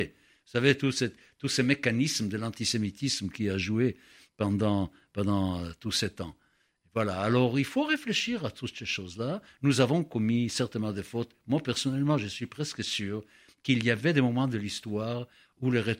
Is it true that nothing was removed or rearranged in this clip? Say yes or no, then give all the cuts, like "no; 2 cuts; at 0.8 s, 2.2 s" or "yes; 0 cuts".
yes; 0 cuts